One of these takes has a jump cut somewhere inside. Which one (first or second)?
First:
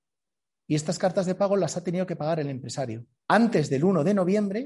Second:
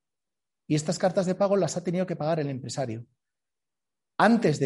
first